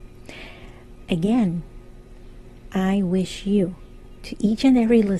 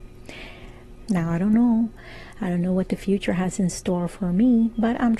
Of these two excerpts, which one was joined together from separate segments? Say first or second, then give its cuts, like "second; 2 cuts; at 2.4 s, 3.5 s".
second; 1 cut; at 1.0 s